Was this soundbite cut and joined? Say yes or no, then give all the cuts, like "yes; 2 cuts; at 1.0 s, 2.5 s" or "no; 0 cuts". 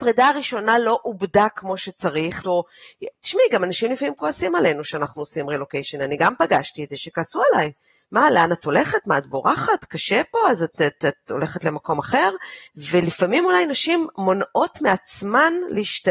yes; 2 cuts; at 2.4 s, 12.7 s